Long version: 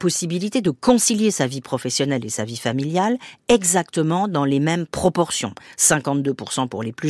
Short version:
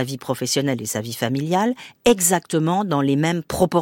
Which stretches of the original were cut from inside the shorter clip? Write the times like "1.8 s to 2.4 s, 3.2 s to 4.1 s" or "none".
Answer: none